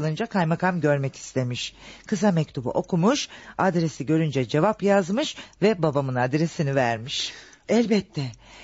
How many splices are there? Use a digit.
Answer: 1